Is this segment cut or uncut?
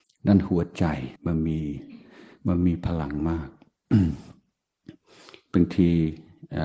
cut